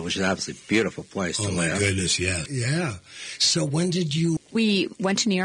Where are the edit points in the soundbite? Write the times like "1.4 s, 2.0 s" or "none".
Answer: 2.5 s, 4.4 s